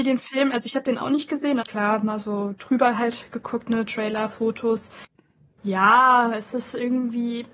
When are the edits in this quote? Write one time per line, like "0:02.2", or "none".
0:01.6